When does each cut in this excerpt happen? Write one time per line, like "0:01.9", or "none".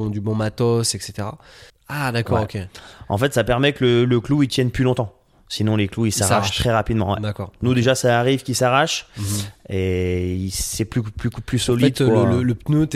0:01.7